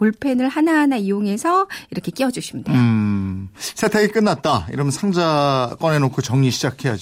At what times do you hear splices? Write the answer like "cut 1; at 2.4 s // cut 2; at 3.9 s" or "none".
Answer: none

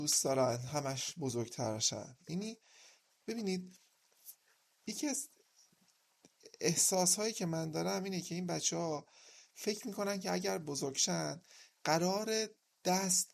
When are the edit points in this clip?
none

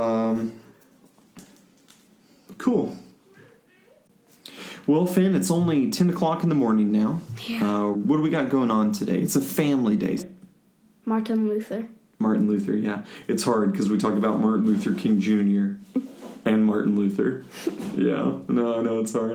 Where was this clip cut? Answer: cut 1; at 7.9 s // cut 2; at 10.2 s

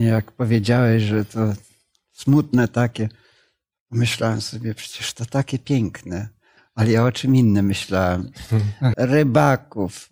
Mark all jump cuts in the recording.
cut 1; at 8.9 s

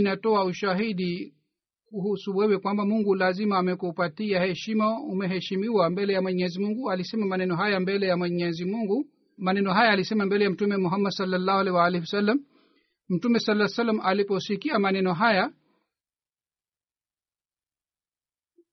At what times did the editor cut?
cut 1; at 9.4 s

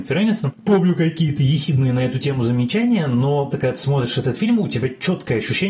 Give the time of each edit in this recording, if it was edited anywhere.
cut 1; at 3.5 s

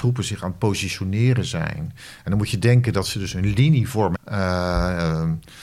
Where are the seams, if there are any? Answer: cut 1; at 4.1 s

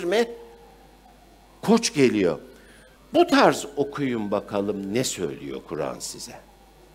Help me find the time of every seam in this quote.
cut 1; at 2.9 s

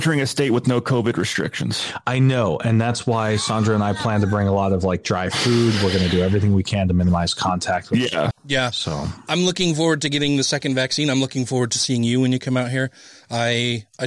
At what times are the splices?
cut 1; at 8.3 s

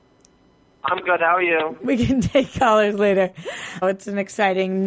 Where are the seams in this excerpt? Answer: cut 1; at 1.8 s // cut 2; at 3.8 s

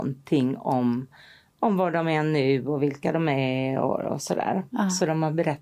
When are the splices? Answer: none

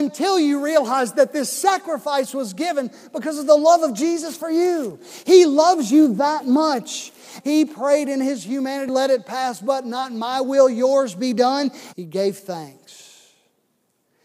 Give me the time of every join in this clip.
cut 1; at 7.4 s // cut 2; at 8.9 s // cut 3; at 11.9 s

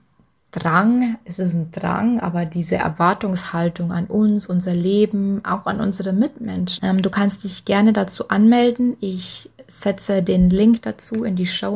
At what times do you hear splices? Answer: cut 1; at 6.8 s

